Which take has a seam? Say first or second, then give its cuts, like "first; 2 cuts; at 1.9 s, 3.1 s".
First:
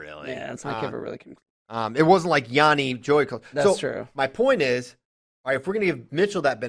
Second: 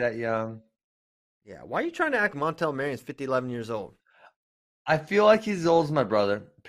second; 1 cut; at 2.3 s